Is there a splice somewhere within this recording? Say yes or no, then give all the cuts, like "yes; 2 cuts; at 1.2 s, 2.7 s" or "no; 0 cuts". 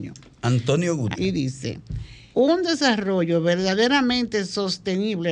yes; 2 cuts; at 1.1 s, 2.3 s